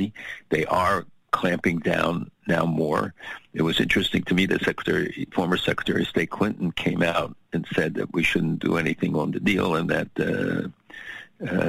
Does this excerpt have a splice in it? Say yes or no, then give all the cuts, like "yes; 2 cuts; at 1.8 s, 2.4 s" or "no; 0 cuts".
no; 0 cuts